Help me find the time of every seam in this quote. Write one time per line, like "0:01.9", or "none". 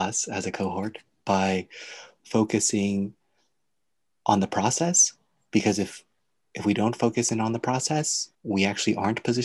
0:08.3